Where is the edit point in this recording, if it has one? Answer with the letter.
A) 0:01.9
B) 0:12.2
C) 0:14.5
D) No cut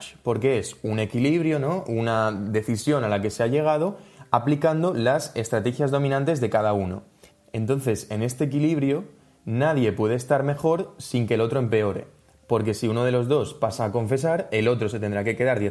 D